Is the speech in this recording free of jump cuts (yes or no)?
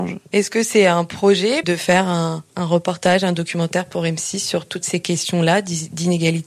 no